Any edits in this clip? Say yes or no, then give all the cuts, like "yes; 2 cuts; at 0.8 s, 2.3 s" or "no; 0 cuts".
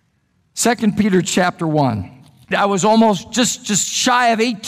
yes; 1 cut; at 2.5 s